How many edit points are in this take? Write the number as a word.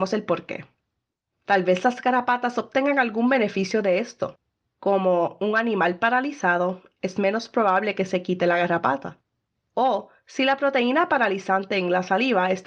zero